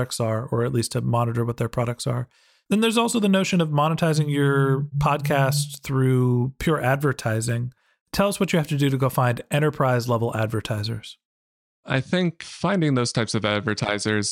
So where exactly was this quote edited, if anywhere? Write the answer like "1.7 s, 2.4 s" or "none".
none

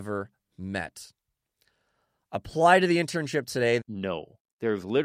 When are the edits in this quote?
3.8 s

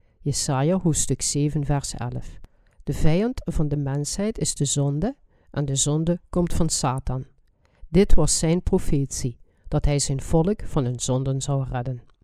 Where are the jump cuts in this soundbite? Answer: 2.7 s, 7.8 s

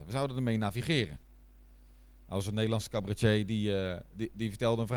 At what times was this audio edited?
none

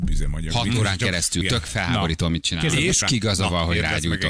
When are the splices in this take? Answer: 1.4 s, 3.0 s

